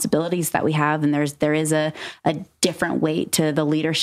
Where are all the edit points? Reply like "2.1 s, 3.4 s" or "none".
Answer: none